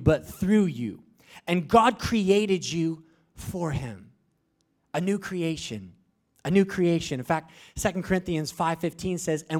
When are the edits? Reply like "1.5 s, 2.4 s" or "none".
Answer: none